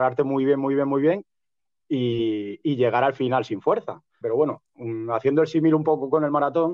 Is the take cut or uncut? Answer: cut